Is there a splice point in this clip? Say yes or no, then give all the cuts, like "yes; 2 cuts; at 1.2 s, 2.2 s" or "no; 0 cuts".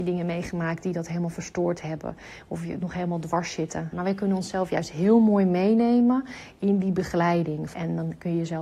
yes; 2 cuts; at 3.9 s, 7.7 s